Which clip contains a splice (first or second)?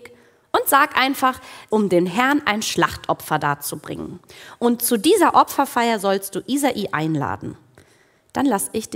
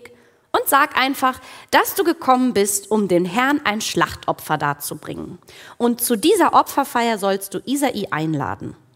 first